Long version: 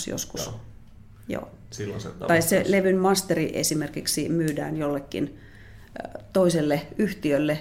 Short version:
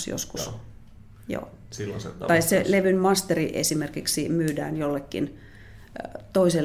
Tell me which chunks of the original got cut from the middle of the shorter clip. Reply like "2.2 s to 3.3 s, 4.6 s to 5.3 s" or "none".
none